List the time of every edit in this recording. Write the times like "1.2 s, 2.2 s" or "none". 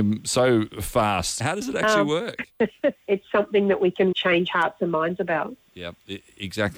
1.4 s, 3.0 s, 4.1 s